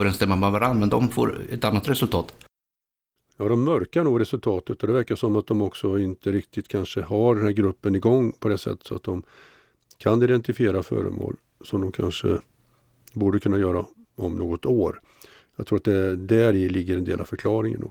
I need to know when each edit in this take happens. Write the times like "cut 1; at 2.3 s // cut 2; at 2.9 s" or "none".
none